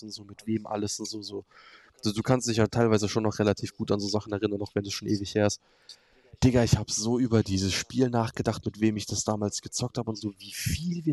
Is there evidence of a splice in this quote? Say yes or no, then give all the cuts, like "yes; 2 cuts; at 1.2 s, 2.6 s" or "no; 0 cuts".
no; 0 cuts